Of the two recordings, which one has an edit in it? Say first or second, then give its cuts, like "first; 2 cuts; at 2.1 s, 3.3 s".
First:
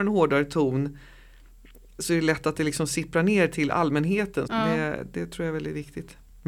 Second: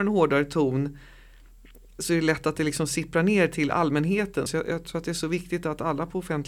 first; 1 cut; at 4.5 s